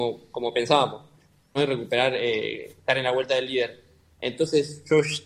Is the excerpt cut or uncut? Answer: cut